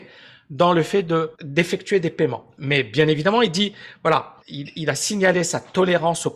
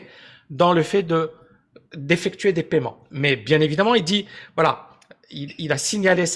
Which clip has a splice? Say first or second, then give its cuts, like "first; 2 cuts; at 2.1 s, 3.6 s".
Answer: first; 2 cuts; at 1.3 s, 4.4 s